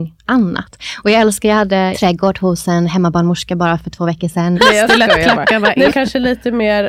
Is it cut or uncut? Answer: cut